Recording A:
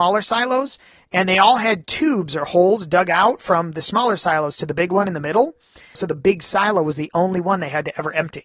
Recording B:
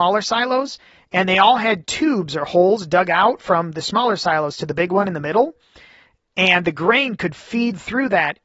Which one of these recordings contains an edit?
A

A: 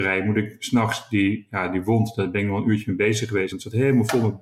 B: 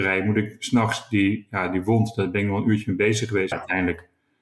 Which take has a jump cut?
B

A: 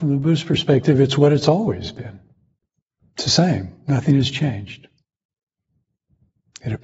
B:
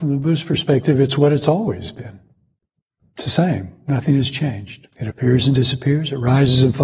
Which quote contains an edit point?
B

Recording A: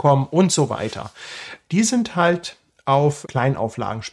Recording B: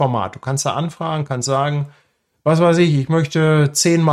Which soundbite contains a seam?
A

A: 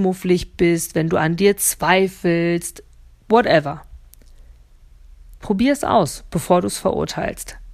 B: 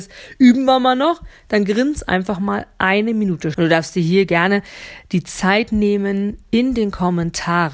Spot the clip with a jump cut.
B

